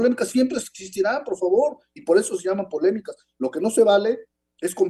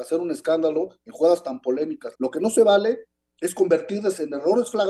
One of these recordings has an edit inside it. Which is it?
second; 1 cut; at 2.1 s

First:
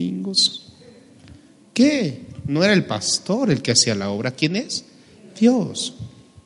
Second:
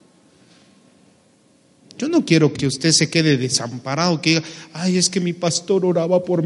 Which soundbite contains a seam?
second; 1 cut; at 2.5 s

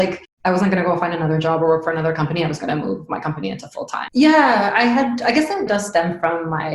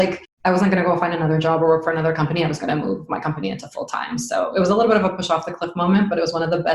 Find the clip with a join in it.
first; 2 cuts; at 4.1 s, 5.7 s

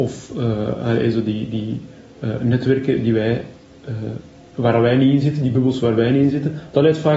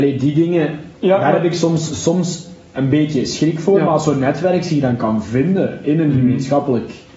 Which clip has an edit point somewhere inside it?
second; 1 cut; at 0.9 s

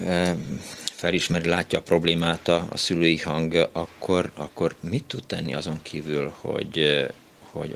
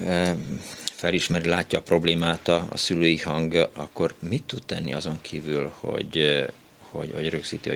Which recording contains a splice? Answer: second; 1 cut; at 3.7 s

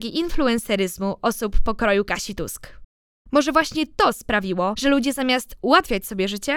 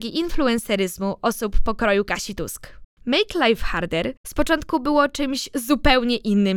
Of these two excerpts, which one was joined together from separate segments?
second; 1 cut; at 3.0 s

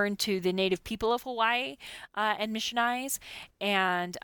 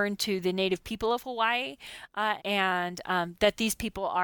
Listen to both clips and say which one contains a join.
second; 1 cut; at 2.4 s

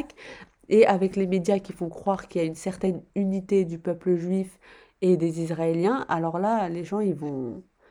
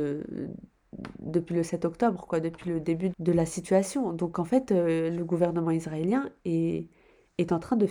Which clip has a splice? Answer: second; 1 cut; at 3.1 s

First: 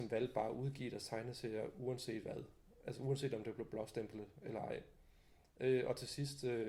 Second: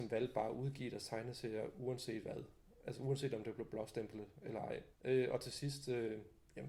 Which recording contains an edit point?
second; 1 cut; at 4.9 s

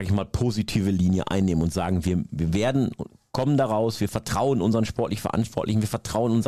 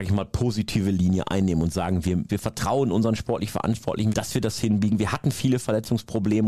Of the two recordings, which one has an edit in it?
second; 2 cuts; at 2.3 s, 4.1 s

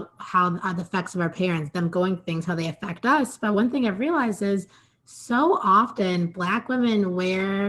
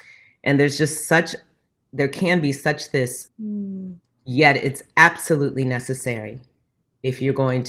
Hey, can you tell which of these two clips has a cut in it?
second; 1 cut; at 3.3 s

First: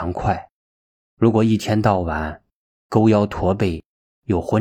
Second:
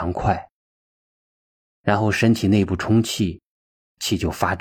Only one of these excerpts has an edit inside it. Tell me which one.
first; 1 cut; at 1.0 s

